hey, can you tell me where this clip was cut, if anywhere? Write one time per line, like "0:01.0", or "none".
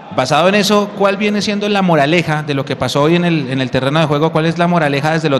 none